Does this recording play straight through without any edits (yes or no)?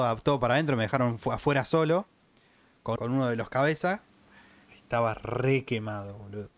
no